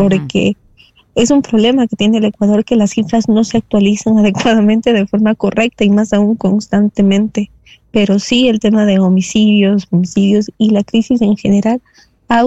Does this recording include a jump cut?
no; 0 cuts

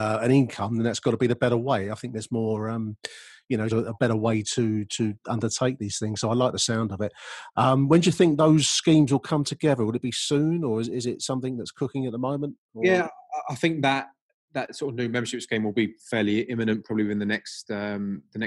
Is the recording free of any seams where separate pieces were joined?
no; 1 cut; at 3.7 s

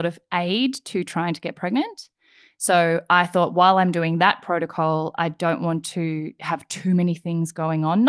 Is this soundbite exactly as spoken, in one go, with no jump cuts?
yes; 0 cuts

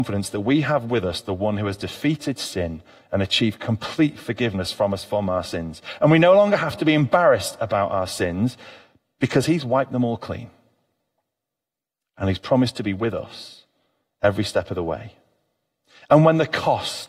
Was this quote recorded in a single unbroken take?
yes; 0 cuts

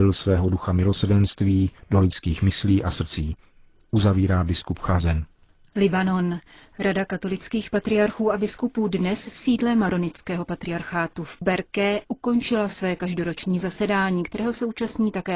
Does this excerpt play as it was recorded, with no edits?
yes; 0 cuts

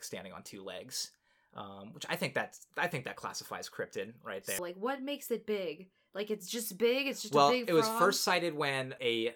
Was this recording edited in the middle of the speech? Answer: yes; 1 cut; at 4.6 s

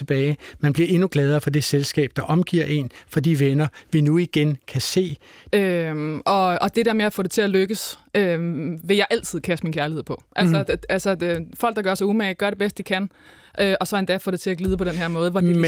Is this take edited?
yes; 1 cut; at 5.5 s

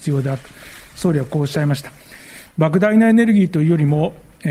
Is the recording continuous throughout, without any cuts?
yes; 0 cuts

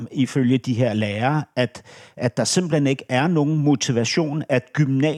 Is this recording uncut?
yes; 0 cuts

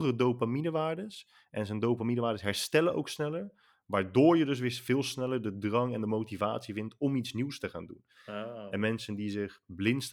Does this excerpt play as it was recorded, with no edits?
yes; 0 cuts

